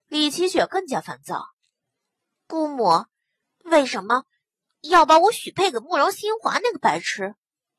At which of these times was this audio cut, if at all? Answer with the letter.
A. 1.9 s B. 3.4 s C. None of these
B